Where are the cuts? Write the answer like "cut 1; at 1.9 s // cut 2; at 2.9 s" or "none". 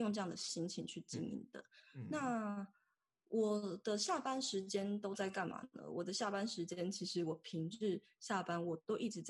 none